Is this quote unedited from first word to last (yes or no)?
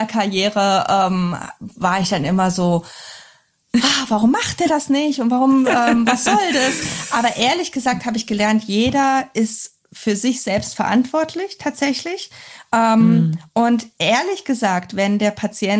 yes